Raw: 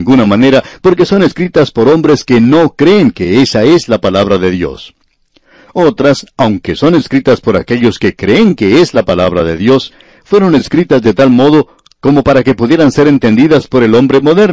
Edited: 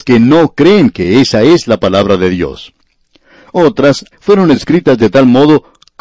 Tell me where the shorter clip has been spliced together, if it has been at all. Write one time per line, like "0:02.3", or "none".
0:04.1

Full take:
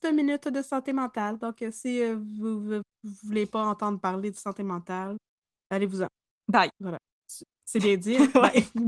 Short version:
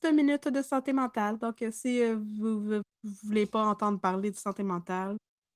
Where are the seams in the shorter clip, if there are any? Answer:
none

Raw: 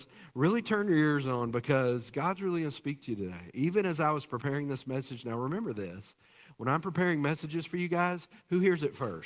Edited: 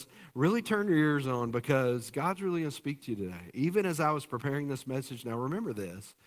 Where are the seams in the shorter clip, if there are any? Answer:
none

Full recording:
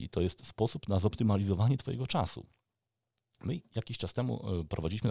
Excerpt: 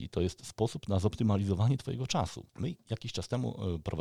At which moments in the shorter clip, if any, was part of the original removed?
0:02.5

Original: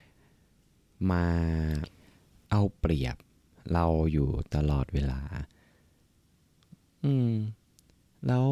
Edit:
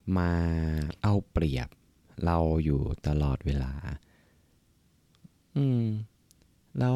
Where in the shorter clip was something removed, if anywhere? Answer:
0:01.0

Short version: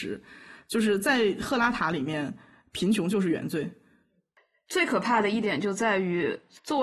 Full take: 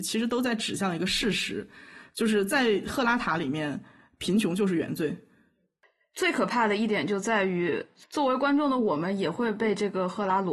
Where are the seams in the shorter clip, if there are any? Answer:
none

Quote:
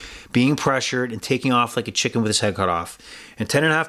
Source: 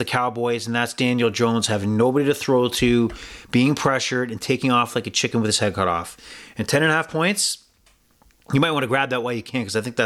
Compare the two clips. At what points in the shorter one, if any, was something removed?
none

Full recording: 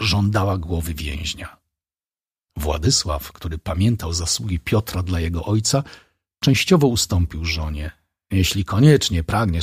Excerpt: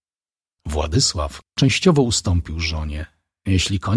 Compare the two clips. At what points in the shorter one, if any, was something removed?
0:01.4

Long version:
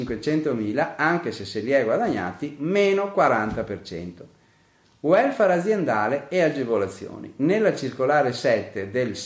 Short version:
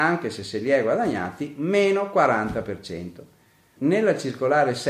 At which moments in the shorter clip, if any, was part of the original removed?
0:03.8

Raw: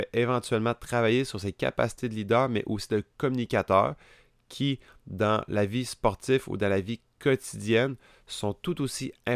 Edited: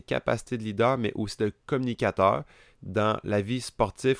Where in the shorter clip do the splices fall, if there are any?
0:02.7

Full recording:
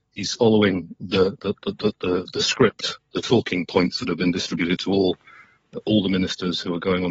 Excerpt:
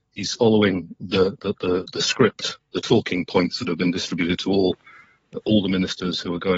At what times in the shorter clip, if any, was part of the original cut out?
0:01.6

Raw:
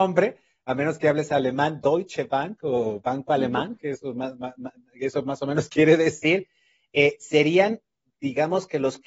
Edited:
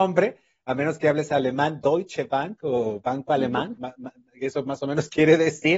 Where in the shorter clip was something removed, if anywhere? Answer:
0:03.8

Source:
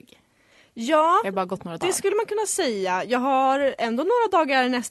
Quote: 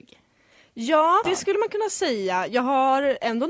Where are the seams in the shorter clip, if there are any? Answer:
0:01.2

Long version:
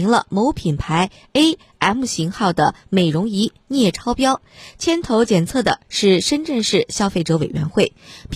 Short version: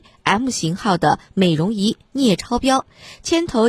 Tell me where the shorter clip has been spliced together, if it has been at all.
none

